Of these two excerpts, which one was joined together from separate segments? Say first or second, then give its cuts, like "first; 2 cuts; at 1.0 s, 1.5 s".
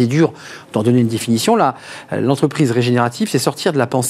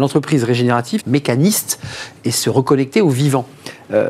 second; 1 cut; at 1.0 s